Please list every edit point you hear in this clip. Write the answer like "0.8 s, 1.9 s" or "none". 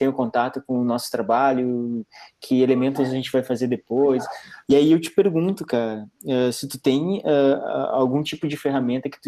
4.6 s